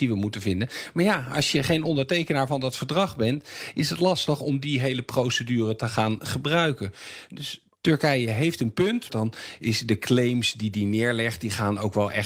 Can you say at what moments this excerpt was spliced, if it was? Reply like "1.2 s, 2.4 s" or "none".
9.1 s